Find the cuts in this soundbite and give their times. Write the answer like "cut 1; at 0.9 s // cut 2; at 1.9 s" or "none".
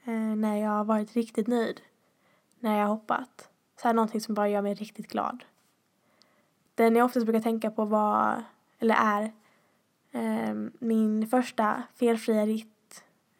none